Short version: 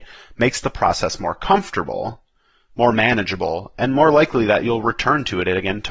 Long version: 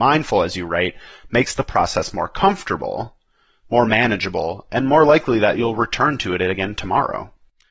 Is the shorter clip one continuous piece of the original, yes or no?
yes